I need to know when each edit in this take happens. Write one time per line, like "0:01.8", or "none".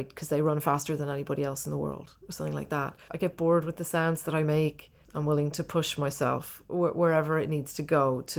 0:03.1
0:05.0